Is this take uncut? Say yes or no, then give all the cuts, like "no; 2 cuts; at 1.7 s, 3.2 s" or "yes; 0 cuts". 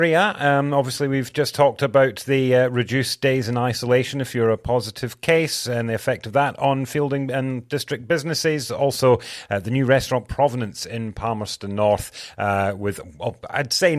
yes; 0 cuts